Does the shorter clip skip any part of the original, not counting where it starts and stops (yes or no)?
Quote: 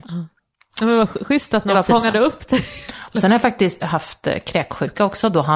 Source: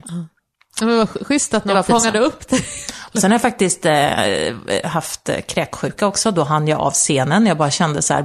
yes